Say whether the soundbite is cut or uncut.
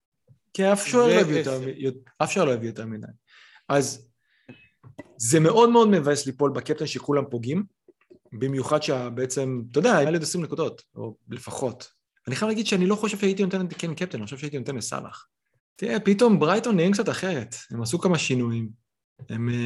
cut